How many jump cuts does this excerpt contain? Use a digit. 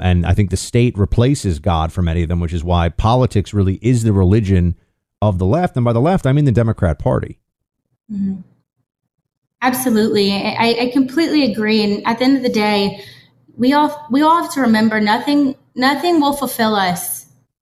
0